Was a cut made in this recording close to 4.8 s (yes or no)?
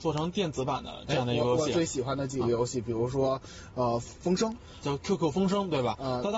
yes